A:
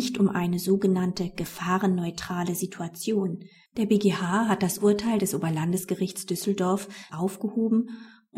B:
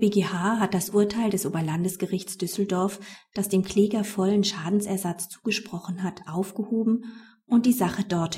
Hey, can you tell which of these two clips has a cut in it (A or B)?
A